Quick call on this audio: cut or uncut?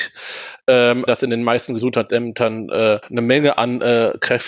cut